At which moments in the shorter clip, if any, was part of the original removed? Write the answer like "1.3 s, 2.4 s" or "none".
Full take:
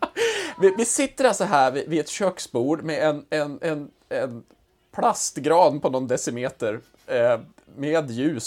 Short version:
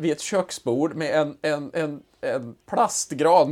2.6 s